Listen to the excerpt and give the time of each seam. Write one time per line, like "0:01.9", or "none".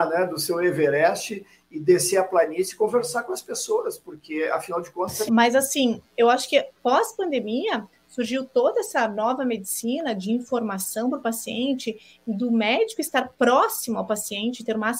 0:05.3